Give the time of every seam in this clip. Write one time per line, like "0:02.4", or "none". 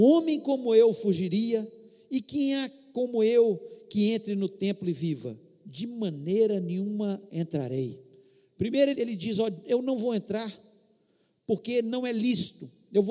0:08.9